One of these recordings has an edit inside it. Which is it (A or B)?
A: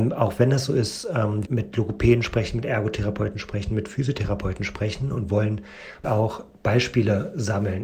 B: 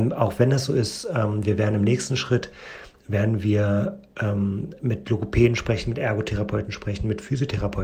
A